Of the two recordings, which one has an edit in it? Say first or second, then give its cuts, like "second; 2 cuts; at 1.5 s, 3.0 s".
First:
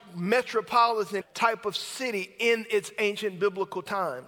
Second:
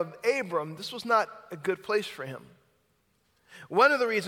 first; 1 cut; at 1.2 s